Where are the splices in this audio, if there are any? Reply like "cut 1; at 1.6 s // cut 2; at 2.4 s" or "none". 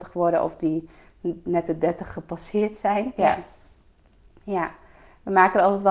cut 1; at 3.2 s